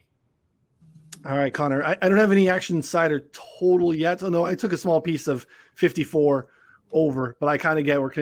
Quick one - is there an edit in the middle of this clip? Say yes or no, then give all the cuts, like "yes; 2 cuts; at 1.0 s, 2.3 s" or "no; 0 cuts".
no; 0 cuts